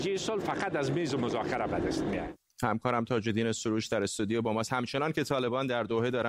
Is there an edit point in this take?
yes; 1 cut; at 2.5 s

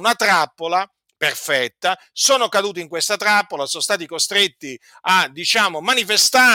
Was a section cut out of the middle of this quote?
no; 0 cuts

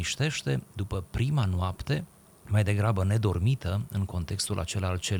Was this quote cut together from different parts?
no; 0 cuts

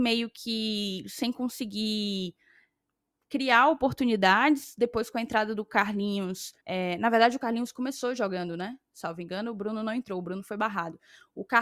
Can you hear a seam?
yes; 1 cut; at 6.6 s

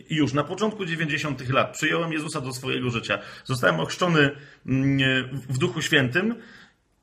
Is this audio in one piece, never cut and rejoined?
yes; 0 cuts

